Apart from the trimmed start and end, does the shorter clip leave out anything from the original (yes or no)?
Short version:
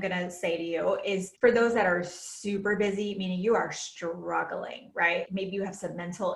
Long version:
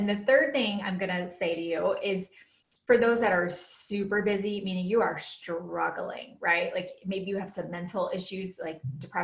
yes